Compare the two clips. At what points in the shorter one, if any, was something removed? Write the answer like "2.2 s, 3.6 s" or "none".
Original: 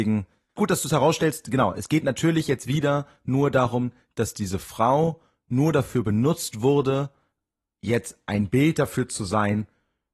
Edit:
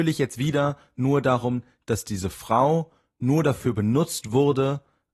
none